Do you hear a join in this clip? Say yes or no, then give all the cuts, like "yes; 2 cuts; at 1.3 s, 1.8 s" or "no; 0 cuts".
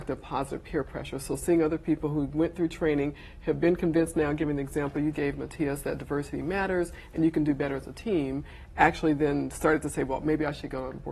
yes; 1 cut; at 5.1 s